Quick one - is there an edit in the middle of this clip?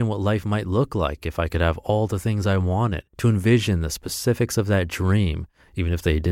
yes; 1 cut; at 3.1 s

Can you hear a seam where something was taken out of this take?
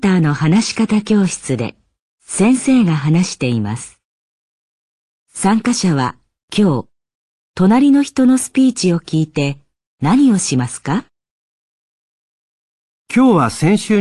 no; 0 cuts

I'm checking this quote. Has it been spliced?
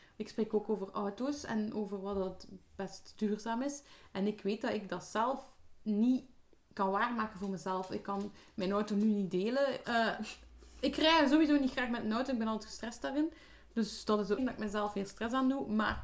yes; 2 cuts; at 9.8 s, 14.4 s

